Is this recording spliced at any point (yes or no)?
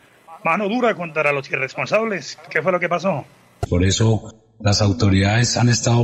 yes